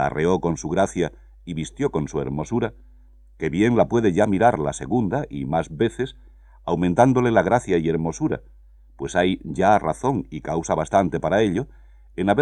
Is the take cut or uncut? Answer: uncut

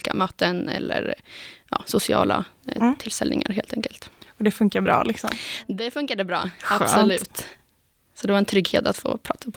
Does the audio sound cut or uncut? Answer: uncut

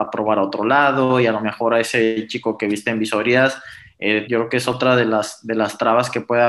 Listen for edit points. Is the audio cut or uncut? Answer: cut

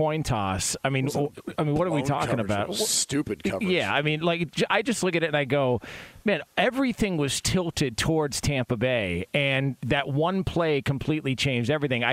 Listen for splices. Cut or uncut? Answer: uncut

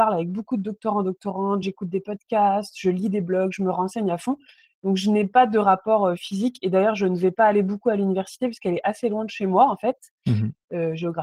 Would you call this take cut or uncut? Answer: uncut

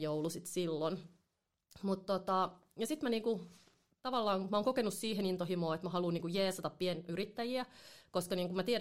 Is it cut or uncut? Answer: uncut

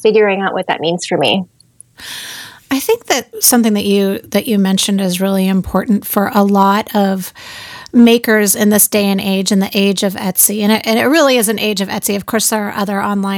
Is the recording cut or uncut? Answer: cut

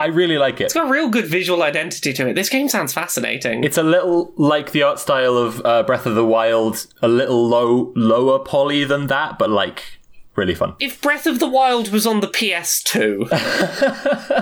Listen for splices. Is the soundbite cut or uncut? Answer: uncut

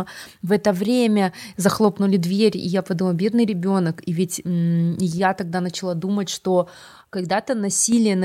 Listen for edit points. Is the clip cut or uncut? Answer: uncut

